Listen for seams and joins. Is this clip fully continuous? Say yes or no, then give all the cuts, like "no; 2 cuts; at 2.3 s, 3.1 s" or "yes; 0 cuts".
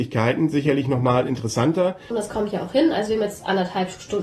no; 1 cut; at 2.1 s